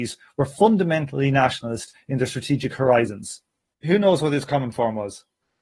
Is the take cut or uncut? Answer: cut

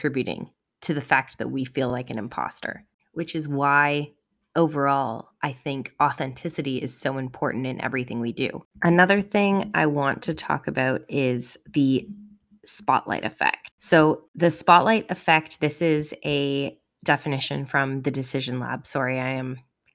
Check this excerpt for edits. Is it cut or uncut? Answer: uncut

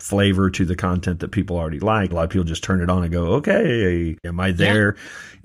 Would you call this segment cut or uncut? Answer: cut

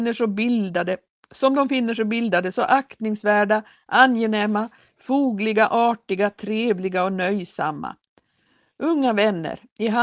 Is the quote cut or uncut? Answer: uncut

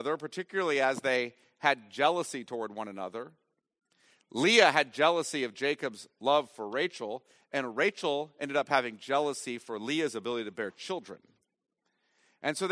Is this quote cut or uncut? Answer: uncut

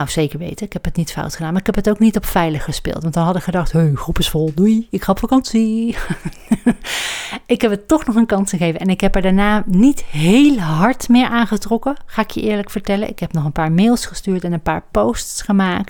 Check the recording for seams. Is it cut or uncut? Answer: uncut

